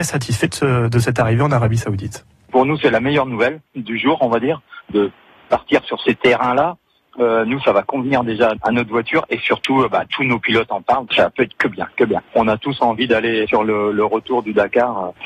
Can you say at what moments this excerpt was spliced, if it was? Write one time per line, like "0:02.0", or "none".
0:11.1